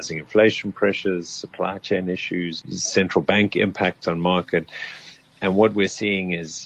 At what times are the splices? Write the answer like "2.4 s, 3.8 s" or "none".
2.6 s

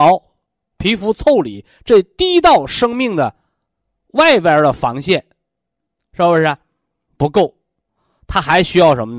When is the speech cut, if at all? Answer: 7.1 s

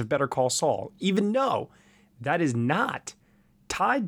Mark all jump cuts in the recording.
none

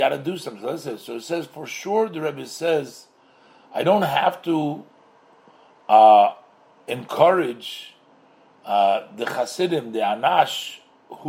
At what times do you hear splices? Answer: none

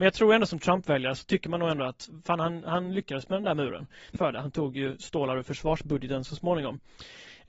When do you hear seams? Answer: 4.2 s

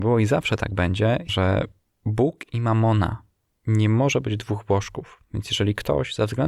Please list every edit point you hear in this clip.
1.3 s

